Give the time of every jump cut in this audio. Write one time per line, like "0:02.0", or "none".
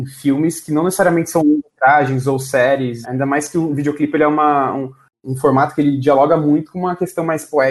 0:03.0

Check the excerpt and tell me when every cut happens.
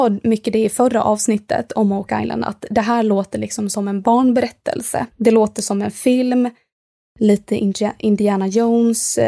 0:05.1

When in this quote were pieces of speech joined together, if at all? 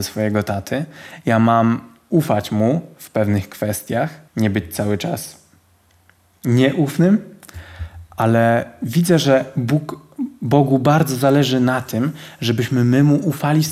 0:04.3

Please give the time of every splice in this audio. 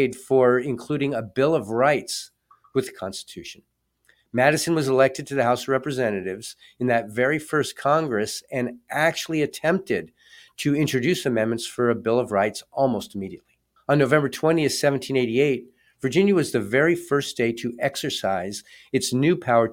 0:13.8

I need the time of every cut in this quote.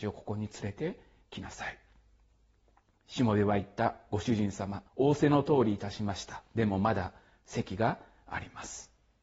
0:04.9

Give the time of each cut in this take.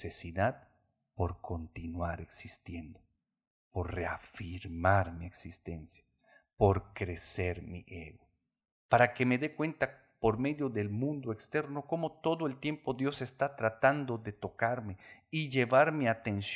0:08.7

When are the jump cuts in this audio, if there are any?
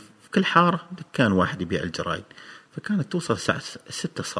none

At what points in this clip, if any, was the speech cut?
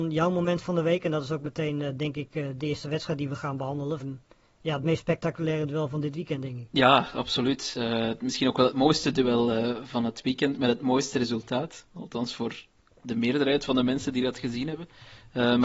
0:04.0

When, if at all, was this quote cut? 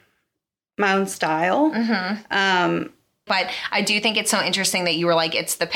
0:03.3

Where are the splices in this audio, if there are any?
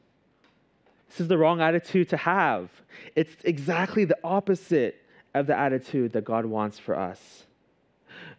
0:01.0

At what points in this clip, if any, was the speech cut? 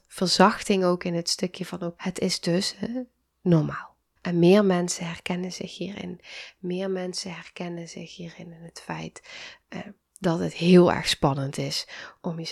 0:02.0
0:04.2

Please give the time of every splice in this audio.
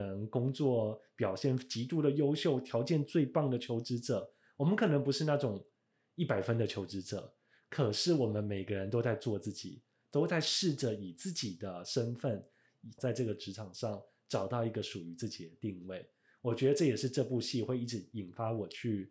0:13.0

